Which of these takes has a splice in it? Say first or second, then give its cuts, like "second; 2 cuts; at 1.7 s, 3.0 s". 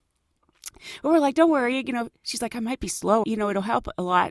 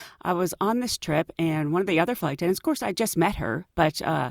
first; 1 cut; at 3.2 s